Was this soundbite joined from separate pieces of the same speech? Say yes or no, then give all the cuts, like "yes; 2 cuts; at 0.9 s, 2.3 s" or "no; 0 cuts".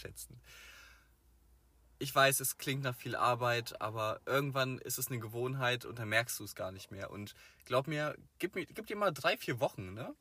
no; 0 cuts